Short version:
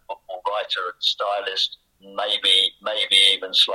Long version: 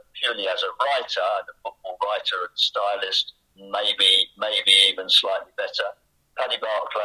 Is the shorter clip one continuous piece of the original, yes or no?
yes